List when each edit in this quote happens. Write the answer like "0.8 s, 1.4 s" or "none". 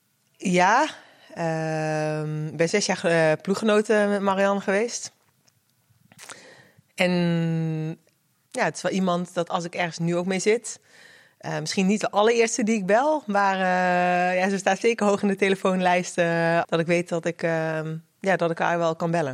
16.6 s